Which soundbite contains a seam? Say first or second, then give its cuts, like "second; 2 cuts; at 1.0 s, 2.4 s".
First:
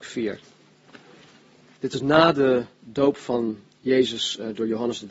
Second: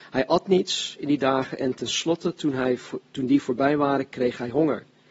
first; 1 cut; at 1.8 s